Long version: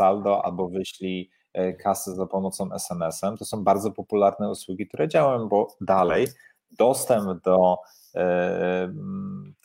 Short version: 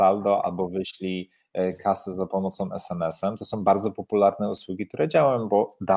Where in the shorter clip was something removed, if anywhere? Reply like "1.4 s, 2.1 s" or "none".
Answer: none